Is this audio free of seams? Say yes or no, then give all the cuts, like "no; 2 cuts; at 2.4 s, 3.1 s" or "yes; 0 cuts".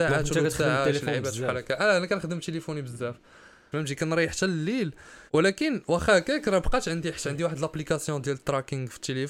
no; 2 cuts; at 3.7 s, 5.3 s